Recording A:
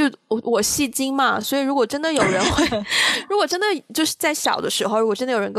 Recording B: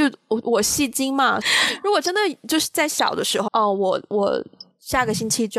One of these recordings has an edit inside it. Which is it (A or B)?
B